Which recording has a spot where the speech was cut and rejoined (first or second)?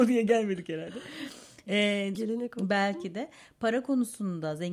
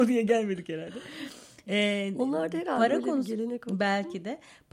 first